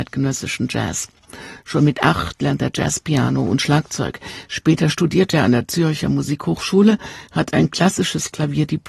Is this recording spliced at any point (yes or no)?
no